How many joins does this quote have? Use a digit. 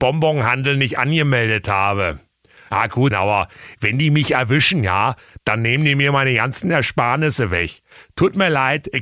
1